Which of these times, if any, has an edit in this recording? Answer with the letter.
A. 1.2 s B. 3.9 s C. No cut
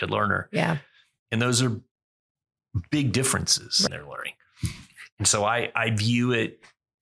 B